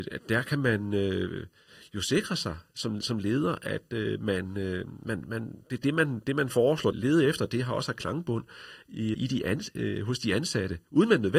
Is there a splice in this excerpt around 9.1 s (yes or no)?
yes